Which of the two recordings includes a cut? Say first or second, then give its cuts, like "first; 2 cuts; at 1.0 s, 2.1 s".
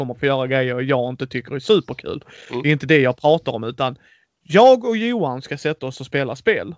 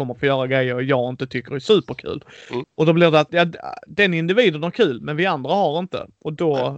second; 1 cut; at 2.6 s